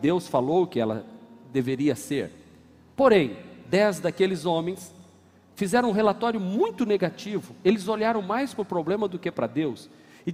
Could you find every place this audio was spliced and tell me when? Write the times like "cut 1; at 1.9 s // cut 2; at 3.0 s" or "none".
none